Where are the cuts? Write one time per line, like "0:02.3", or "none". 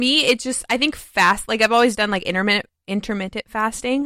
none